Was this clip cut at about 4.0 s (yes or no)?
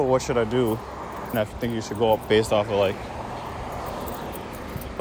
no